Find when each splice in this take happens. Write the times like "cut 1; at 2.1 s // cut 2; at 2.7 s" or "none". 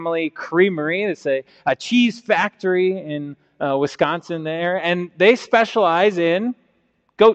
none

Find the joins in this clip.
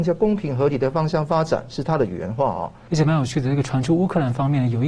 cut 1; at 2.9 s

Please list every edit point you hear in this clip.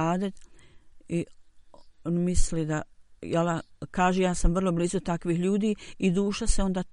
cut 1; at 3.2 s

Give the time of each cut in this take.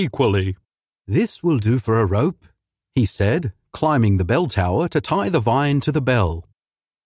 cut 1; at 0.9 s

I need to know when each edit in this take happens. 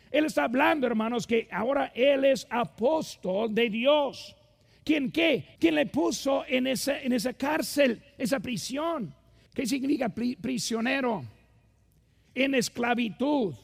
cut 1; at 5.6 s // cut 2; at 9.5 s

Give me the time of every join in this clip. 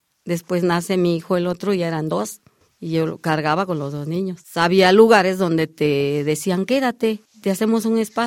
none

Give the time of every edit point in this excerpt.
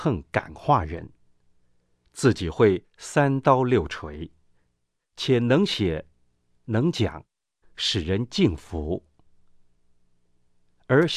cut 1; at 7.6 s

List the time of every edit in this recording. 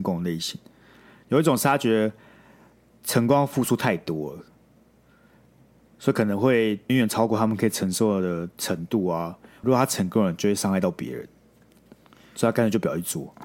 cut 1; at 6.9 s // cut 2; at 9.6 s

